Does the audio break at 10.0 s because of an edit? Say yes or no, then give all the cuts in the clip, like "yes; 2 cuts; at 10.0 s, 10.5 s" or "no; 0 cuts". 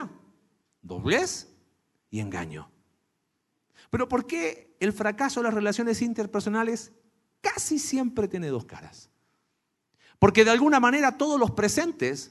no; 0 cuts